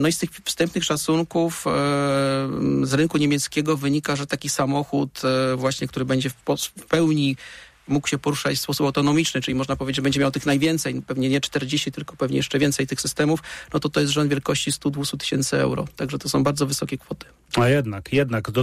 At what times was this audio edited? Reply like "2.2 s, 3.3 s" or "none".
none